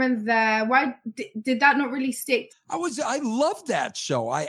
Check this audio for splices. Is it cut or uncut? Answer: cut